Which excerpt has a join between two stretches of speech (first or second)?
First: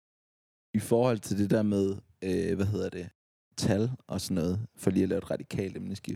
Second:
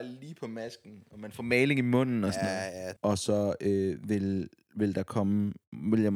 second